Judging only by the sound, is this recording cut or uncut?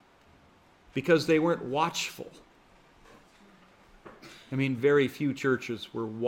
cut